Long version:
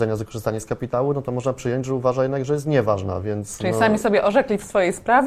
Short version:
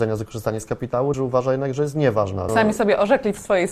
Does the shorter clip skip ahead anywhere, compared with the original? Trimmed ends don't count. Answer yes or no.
yes